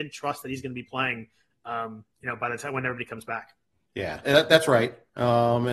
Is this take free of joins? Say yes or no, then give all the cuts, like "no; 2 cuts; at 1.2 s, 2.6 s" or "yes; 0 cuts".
no; 1 cut; at 4.2 s